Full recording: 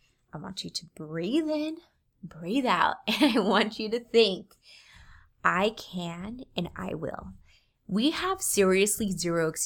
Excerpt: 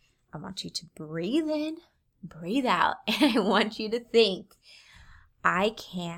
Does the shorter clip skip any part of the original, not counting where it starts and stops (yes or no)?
no